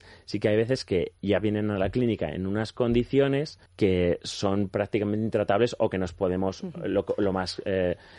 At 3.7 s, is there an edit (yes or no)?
yes